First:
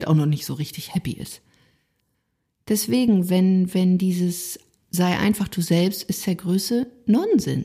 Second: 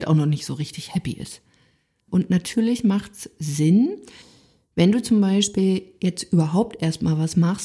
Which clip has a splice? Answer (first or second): second